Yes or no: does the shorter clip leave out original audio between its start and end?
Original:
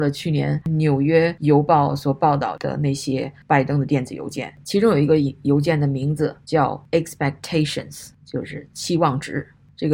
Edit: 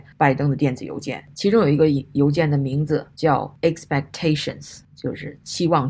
no